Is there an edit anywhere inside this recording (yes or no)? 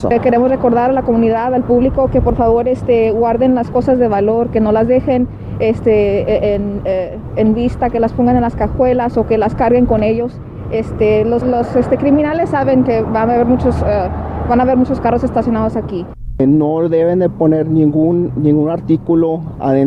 yes